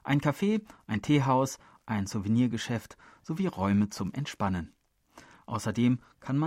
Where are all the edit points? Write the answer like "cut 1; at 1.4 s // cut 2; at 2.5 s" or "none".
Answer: none